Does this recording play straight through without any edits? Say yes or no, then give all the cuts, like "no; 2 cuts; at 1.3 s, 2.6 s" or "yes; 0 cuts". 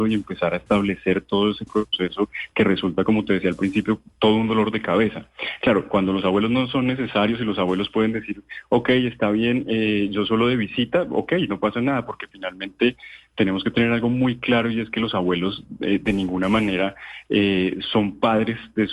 yes; 0 cuts